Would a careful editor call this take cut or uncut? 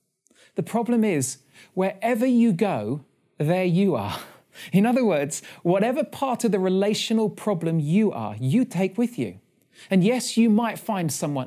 uncut